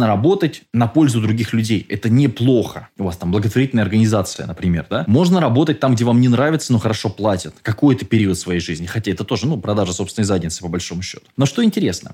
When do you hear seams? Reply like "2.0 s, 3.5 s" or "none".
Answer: none

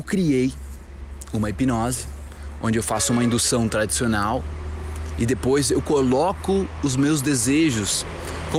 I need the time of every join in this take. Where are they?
none

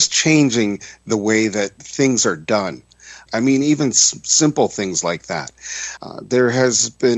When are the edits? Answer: 3.3 s, 6.0 s

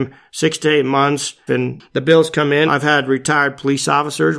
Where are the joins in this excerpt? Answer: 1.5 s, 2.7 s

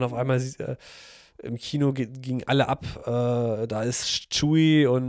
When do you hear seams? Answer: none

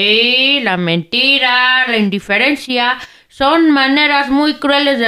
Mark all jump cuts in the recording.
1.9 s

